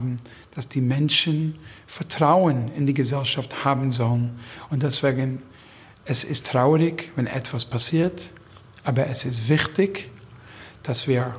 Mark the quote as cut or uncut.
uncut